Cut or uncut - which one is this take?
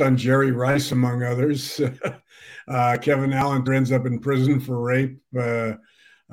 cut